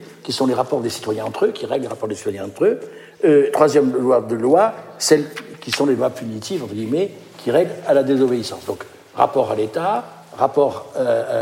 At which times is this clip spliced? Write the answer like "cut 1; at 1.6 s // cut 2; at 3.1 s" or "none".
none